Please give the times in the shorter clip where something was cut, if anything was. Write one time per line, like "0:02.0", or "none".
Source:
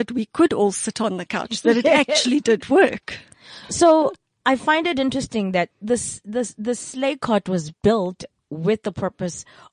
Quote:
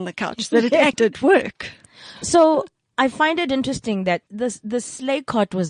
0:00.9
0:04.3